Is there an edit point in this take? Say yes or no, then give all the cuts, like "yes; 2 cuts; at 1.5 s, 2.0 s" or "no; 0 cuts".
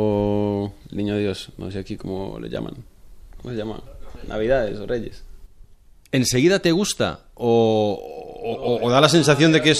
no; 0 cuts